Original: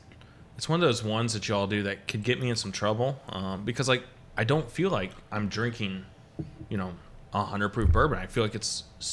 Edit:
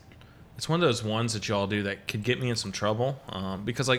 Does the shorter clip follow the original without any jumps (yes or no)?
yes